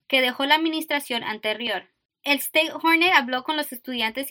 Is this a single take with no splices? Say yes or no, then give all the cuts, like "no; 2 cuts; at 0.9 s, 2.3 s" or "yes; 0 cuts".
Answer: yes; 0 cuts